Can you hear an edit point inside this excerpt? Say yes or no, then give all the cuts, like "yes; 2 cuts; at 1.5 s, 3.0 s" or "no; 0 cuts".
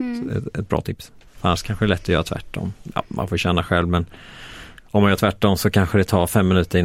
yes; 1 cut; at 1.3 s